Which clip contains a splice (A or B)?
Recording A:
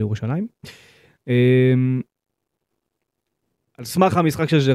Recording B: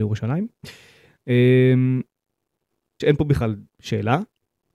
B